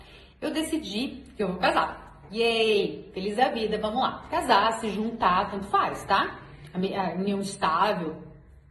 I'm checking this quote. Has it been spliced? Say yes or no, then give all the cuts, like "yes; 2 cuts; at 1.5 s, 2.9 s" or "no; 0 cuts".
no; 0 cuts